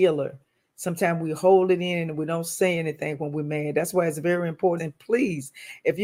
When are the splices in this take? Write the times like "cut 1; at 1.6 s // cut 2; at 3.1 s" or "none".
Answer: cut 1; at 4.8 s